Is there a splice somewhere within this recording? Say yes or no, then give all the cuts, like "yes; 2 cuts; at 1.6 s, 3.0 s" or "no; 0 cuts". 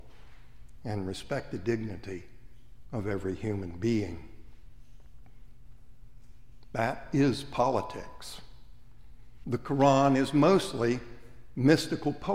yes; 1 cut; at 9.4 s